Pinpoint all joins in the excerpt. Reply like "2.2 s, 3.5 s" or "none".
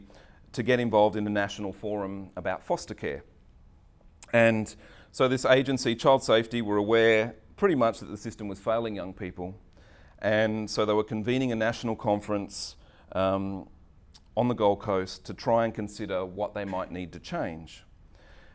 none